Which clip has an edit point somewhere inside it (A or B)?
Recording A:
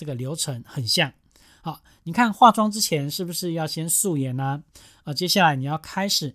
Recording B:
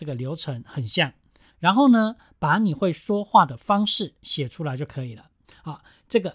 B